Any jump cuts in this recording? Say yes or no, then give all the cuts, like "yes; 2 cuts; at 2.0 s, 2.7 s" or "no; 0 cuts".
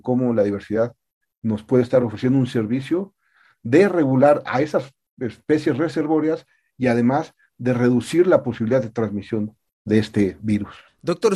no; 0 cuts